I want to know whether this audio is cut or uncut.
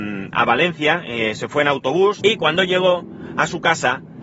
cut